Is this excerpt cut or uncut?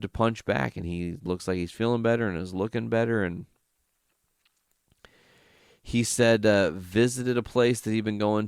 uncut